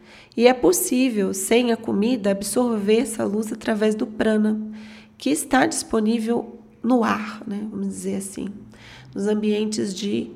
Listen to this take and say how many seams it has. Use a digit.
0